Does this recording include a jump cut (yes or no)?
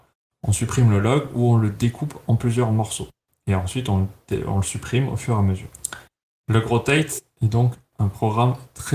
no